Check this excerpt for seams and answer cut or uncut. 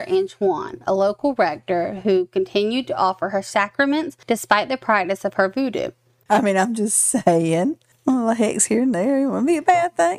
cut